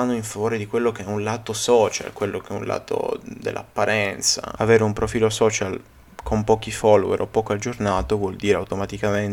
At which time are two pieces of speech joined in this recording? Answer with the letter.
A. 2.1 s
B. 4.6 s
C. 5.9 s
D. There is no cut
B